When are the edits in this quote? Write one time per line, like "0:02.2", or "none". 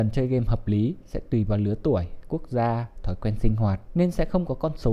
0:03.9